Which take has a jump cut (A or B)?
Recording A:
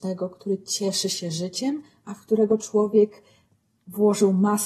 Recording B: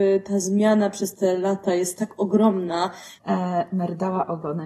B